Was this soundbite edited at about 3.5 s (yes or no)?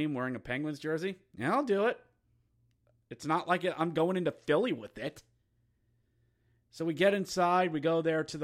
no